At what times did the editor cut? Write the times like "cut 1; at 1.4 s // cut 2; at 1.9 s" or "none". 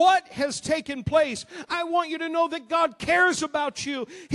none

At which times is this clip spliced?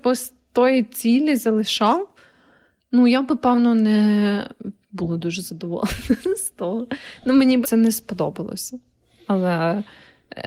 cut 1; at 7.6 s

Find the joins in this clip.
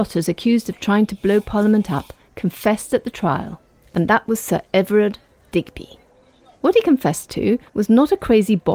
cut 1; at 7.7 s

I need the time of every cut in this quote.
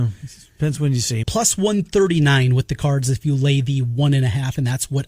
cut 1; at 1.2 s

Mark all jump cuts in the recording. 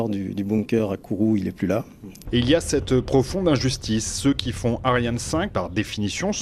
cut 1; at 2.2 s // cut 2; at 5.5 s

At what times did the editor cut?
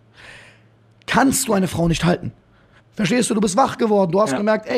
cut 1; at 2.8 s

